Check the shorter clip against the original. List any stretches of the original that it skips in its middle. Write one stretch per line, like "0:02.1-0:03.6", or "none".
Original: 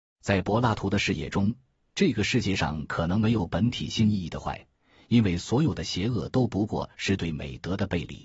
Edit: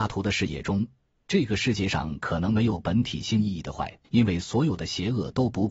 0:04.7-0:05.0